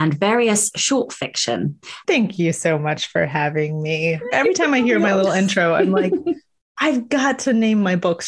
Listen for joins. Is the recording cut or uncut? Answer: cut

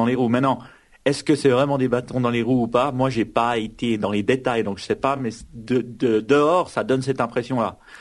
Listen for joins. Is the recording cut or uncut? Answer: uncut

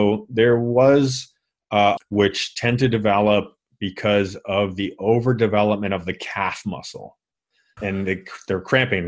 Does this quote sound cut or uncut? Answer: cut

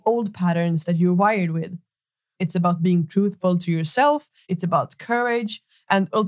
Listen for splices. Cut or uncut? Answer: cut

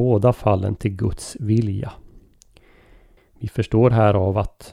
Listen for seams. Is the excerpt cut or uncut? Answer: cut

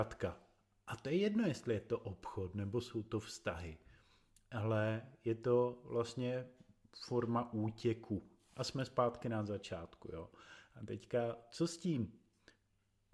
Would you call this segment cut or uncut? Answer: uncut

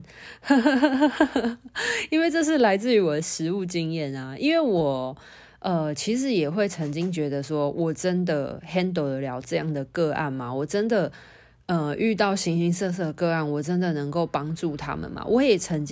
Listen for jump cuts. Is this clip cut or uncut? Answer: uncut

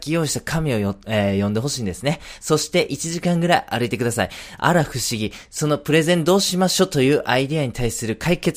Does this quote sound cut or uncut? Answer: cut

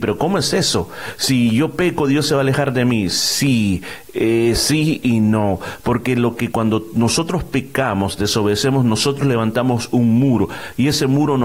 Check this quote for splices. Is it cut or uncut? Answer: uncut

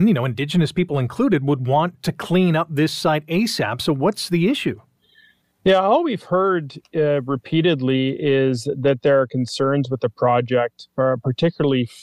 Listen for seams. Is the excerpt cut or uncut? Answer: uncut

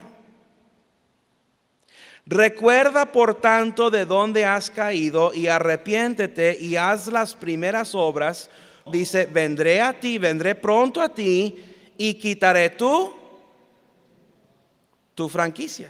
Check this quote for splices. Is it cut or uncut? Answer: cut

